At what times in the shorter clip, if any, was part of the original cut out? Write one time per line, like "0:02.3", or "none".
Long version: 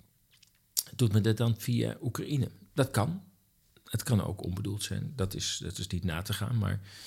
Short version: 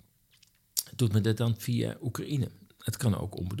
0:02.7